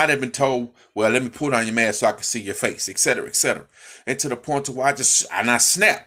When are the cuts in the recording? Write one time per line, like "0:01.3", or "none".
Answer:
none